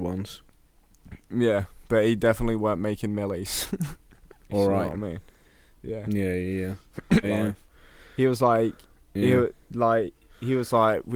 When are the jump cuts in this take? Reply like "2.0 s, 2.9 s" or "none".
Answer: 4.5 s, 7.2 s